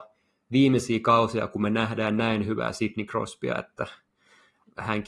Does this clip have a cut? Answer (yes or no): no